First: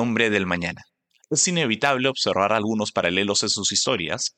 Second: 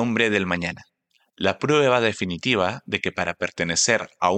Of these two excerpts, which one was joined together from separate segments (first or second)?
first